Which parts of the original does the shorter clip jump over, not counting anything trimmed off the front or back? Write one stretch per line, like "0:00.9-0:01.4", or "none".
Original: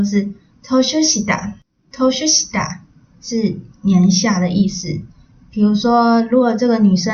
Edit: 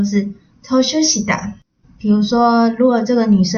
0:01.8-0:05.4